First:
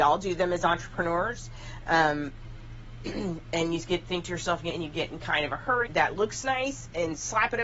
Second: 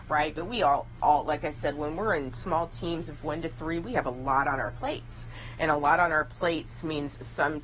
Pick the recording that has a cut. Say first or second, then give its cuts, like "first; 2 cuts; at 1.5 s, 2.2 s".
first; 2 cuts; at 4.7 s, 5.9 s